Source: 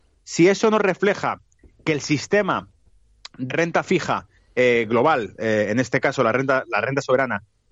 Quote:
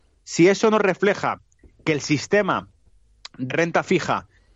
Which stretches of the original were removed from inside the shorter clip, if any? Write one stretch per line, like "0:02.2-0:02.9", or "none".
none